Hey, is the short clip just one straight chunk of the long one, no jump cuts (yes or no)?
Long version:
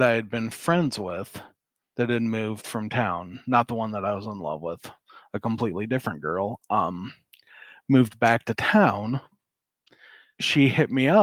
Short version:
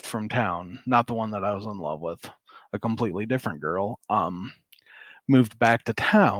yes